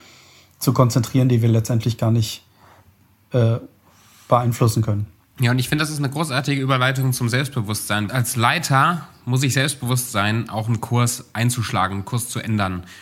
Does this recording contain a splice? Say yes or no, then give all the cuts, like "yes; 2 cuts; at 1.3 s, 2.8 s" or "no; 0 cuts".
yes; 1 cut; at 8.1 s